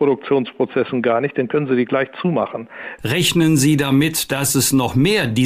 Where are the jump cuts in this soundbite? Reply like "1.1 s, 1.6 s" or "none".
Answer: 3.0 s